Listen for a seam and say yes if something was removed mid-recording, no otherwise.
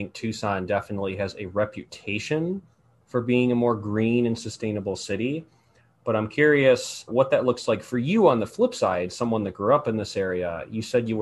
yes